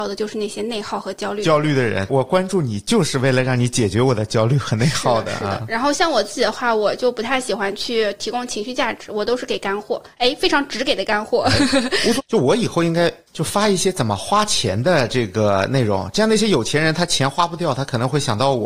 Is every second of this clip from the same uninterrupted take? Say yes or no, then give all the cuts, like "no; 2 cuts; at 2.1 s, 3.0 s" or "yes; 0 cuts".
no; 1 cut; at 12.2 s